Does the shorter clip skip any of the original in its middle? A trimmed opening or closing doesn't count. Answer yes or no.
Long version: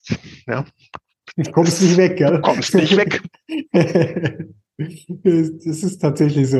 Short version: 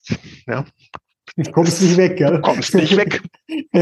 no